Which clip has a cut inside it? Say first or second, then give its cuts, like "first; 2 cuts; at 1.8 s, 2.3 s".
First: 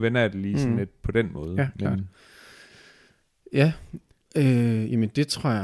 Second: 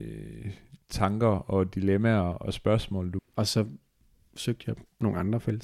second; 1 cut; at 3.2 s